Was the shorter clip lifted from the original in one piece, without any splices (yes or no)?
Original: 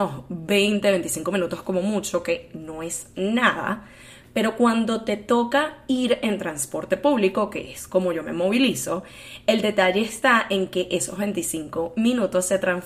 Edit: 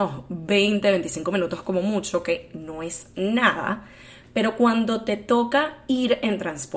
yes